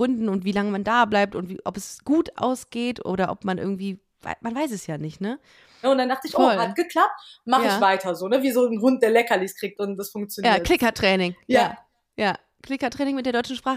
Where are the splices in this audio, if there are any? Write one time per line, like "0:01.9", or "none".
0:05.8